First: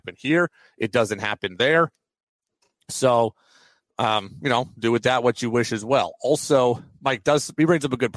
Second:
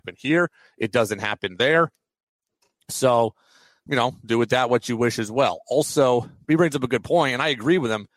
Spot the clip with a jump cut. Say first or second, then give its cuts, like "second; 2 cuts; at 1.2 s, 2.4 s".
second; 2 cuts; at 3.9 s, 6.4 s